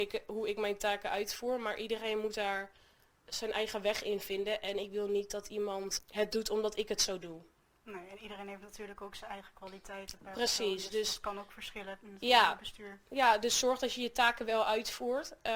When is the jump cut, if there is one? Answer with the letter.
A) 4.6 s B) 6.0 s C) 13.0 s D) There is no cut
B